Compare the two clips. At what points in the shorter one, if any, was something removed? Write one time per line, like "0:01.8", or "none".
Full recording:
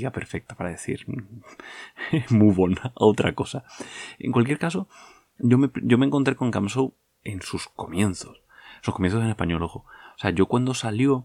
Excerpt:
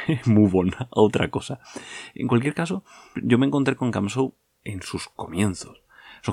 0:03.1